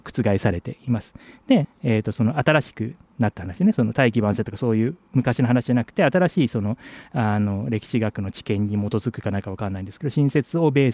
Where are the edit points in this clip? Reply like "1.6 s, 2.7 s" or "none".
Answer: 1.6 s